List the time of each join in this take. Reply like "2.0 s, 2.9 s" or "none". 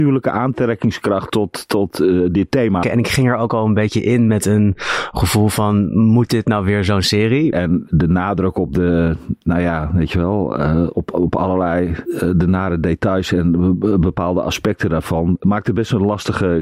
2.8 s, 7.5 s